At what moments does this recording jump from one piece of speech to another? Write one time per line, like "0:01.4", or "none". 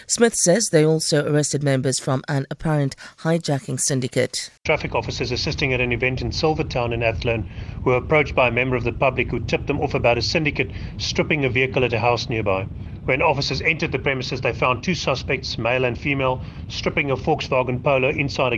0:04.6